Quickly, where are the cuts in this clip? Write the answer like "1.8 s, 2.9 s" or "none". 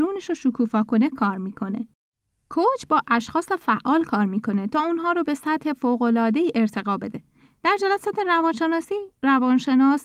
none